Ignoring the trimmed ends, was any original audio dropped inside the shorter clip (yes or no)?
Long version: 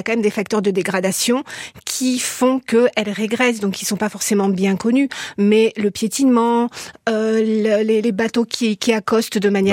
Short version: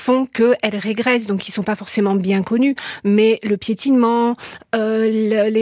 no